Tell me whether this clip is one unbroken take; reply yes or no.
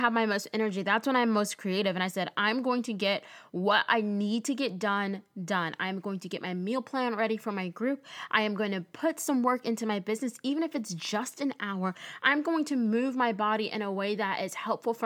yes